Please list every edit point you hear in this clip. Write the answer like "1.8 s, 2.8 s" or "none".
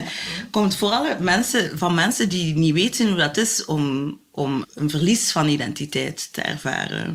4.6 s